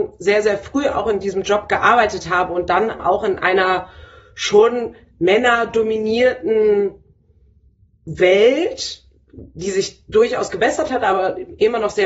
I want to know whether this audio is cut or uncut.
cut